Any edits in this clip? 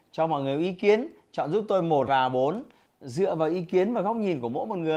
yes; 1 cut; at 2.1 s

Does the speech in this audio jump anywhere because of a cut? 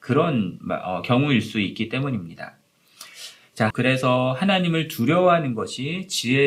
yes; 1 cut; at 3.7 s

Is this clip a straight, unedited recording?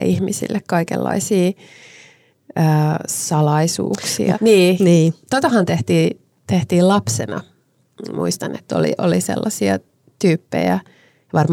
no; 1 cut; at 4.3 s

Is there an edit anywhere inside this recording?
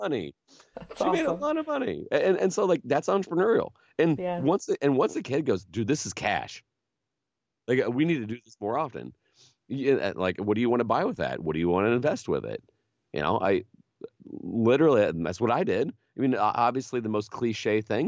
no; 0 cuts

